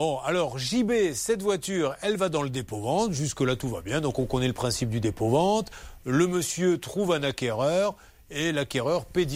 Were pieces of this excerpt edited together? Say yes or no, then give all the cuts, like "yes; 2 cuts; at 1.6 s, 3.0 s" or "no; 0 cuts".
no; 0 cuts